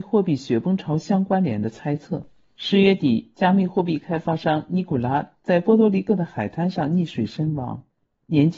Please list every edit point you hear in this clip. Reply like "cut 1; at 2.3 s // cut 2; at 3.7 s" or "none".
none

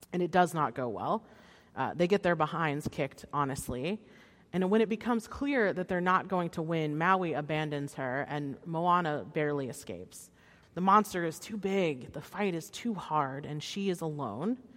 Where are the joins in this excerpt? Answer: cut 1; at 10.6 s

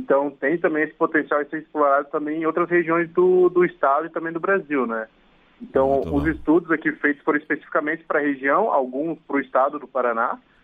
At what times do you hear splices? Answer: none

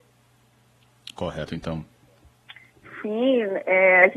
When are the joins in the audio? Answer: cut 1; at 1.5 s

